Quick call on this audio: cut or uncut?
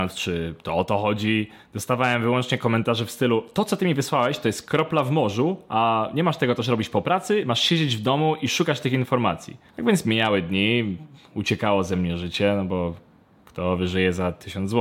cut